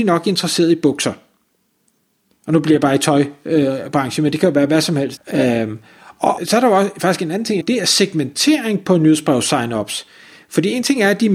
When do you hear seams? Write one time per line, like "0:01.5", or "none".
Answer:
0:05.2
0:06.4
0:07.6